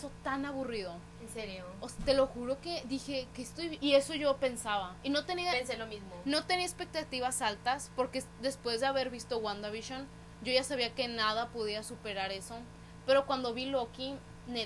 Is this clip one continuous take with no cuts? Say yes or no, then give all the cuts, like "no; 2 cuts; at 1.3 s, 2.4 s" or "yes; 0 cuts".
no; 1 cut; at 3.8 s